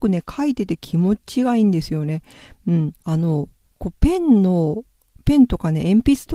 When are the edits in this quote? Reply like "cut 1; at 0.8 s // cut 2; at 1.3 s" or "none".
cut 1; at 3.0 s